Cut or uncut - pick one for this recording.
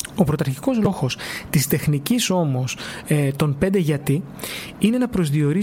uncut